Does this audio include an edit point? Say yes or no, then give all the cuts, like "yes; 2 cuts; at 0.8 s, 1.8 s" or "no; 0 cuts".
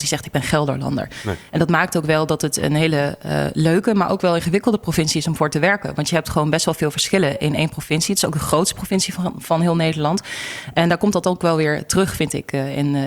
no; 0 cuts